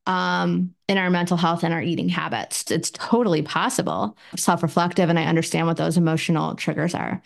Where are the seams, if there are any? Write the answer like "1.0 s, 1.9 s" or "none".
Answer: 2.7 s, 4.3 s